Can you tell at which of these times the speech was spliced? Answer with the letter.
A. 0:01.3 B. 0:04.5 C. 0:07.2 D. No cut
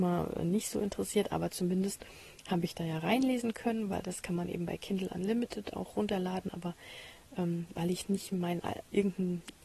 D